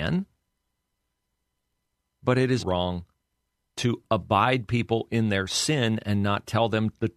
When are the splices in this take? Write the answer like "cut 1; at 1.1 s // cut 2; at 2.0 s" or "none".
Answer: cut 1; at 2.6 s